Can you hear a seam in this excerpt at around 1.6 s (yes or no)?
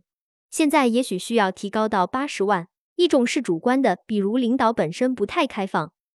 no